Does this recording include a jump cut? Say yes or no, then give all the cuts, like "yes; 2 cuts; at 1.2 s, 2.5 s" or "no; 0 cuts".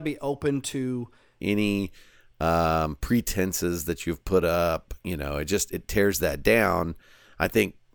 yes; 1 cut; at 1.4 s